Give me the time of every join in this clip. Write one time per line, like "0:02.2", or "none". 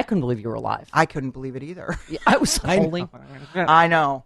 0:02.6